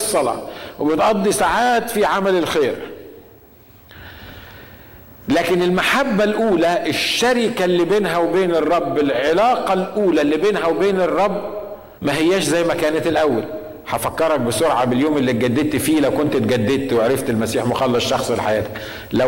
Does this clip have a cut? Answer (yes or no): yes